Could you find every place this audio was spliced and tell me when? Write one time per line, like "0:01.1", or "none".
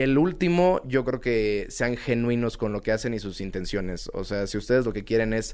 none